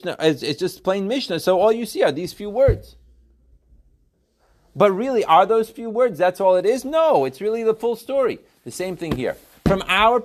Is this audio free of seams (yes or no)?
yes